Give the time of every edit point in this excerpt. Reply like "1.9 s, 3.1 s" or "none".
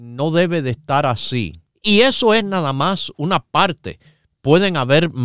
1.7 s